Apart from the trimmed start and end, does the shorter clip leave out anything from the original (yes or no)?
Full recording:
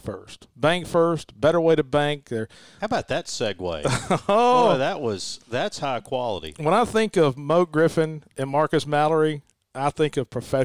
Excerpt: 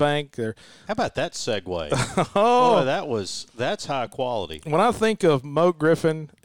no